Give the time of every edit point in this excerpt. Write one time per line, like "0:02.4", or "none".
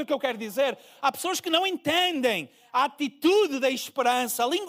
none